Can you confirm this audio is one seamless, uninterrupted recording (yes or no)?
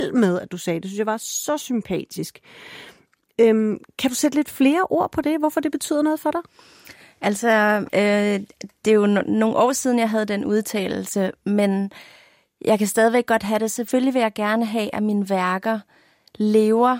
no